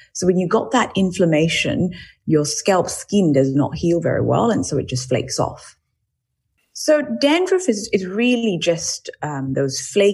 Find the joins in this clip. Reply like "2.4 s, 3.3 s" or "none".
6.6 s